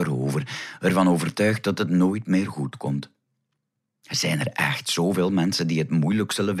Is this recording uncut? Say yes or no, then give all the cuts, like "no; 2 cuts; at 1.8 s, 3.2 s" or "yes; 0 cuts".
yes; 0 cuts